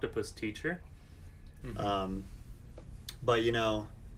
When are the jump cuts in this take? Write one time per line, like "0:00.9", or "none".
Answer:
0:01.6